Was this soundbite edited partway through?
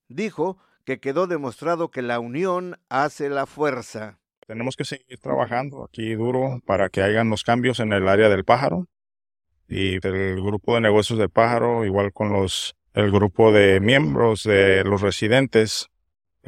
yes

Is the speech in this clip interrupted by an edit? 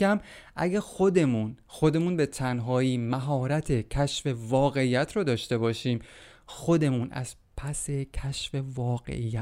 no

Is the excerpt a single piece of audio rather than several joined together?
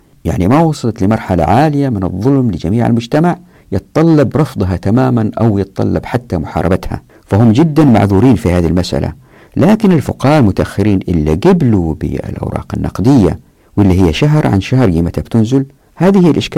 yes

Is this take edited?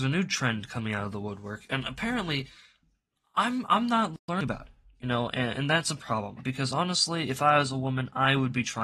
yes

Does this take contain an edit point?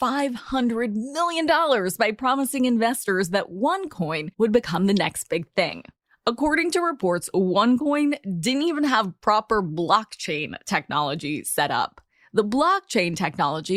no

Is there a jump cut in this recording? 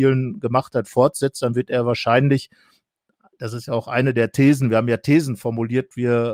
no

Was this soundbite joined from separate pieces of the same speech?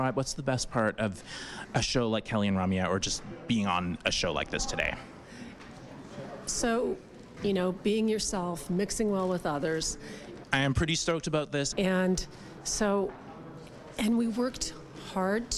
yes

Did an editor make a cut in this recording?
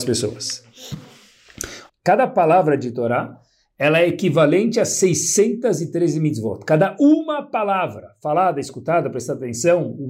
yes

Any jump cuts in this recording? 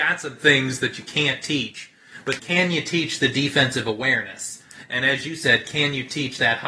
yes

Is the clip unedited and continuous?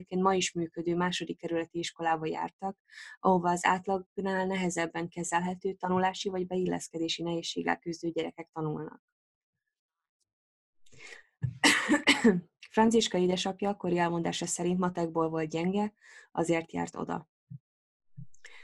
yes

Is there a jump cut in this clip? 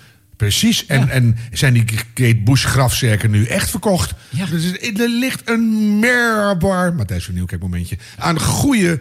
no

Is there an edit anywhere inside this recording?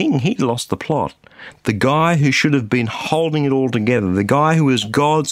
no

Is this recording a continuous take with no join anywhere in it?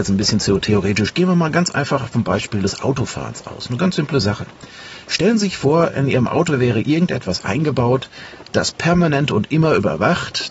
yes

